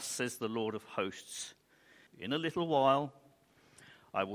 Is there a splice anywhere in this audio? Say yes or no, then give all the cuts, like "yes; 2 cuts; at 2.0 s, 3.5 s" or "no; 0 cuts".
yes; 1 cut; at 2.1 s